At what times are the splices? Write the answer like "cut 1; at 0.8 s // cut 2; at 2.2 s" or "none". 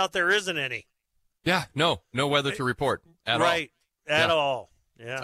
none